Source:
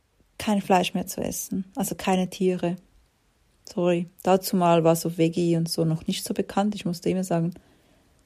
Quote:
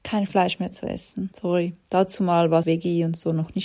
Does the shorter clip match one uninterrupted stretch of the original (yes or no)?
no